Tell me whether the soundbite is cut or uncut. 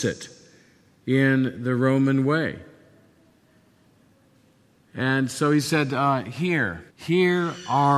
cut